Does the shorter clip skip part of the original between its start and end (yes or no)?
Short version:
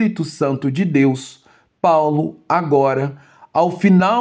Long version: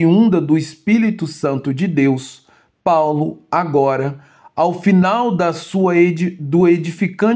no